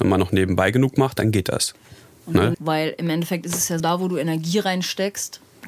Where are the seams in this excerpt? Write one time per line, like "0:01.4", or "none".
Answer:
0:02.5
0:03.8